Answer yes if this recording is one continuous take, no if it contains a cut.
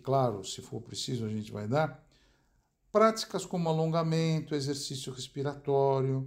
yes